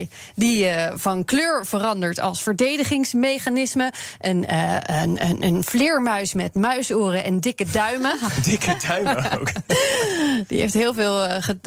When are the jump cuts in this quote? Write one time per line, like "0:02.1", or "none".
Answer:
none